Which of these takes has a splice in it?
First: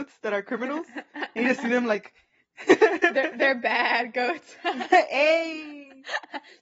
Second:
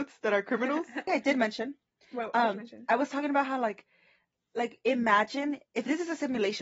second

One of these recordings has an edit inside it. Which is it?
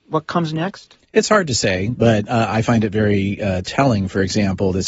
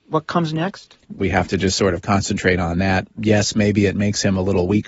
second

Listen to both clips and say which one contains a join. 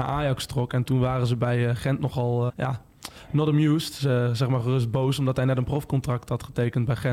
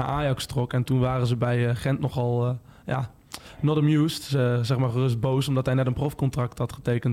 first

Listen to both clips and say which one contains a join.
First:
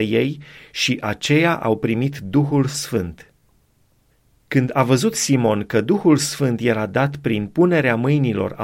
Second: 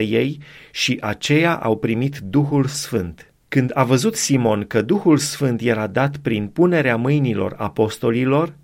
second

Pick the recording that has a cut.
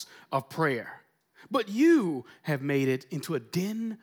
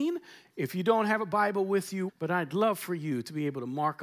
second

